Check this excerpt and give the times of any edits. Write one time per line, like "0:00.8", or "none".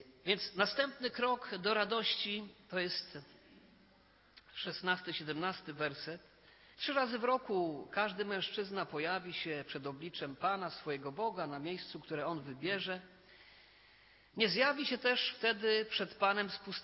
0:06.7